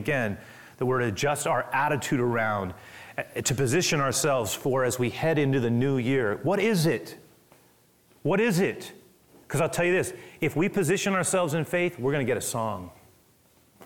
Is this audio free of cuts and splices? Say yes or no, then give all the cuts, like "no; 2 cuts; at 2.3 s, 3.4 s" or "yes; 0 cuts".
yes; 0 cuts